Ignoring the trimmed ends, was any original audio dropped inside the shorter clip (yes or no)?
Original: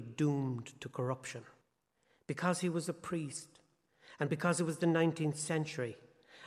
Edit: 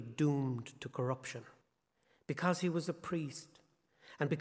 no